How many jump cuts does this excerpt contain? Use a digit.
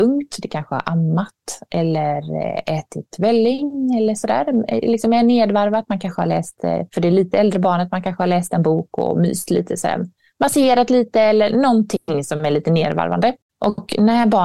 0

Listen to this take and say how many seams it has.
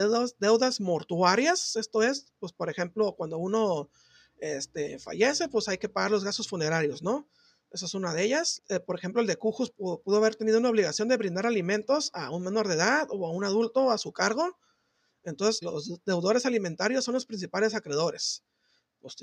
2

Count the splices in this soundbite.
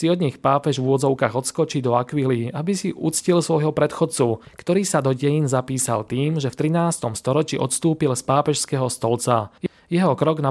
0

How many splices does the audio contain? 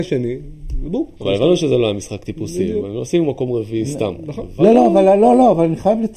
1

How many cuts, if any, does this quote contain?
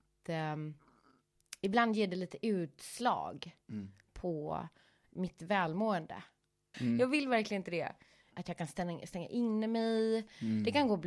2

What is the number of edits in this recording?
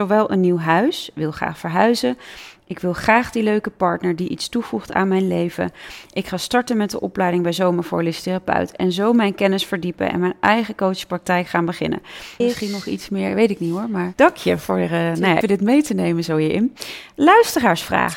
3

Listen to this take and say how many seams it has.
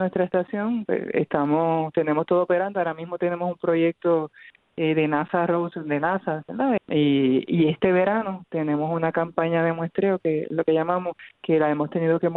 1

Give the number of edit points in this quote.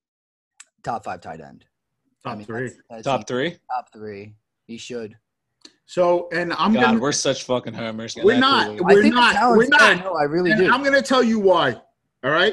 1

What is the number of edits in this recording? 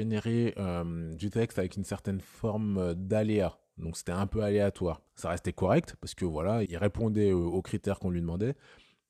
2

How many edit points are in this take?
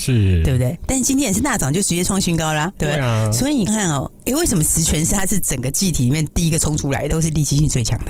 2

